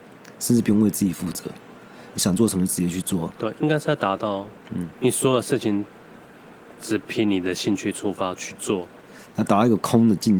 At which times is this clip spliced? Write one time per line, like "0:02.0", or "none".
none